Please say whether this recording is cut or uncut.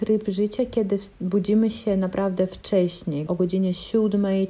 cut